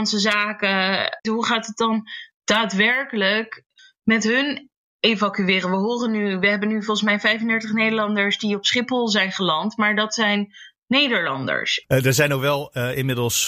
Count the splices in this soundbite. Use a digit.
1